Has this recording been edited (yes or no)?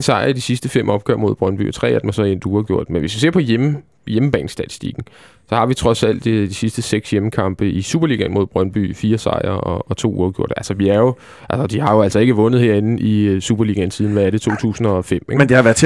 no